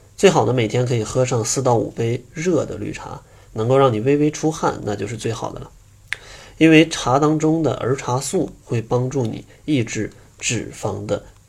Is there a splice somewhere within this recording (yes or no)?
no